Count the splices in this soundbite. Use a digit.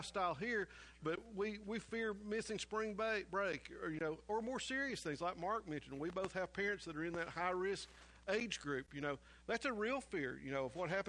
0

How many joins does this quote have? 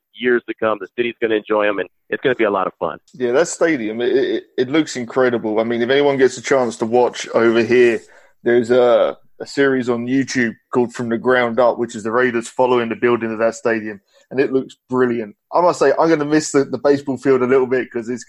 1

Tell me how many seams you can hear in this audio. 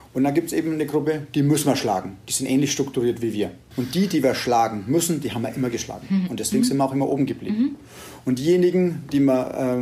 1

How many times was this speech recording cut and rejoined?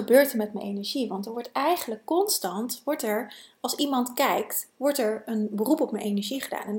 0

